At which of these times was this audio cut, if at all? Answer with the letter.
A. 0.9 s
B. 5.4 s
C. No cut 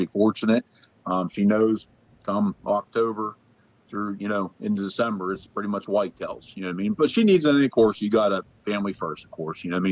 C